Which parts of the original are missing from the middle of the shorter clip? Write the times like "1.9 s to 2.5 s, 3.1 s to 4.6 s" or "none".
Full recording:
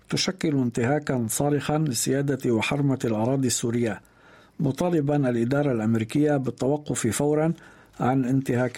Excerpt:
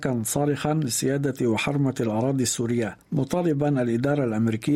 4.1 s to 4.5 s